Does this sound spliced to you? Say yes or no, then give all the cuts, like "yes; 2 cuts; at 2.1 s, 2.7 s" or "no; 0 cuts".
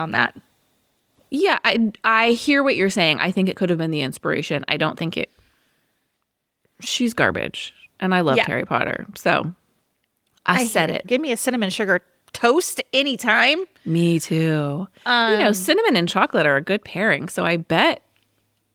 yes; 1 cut; at 11.0 s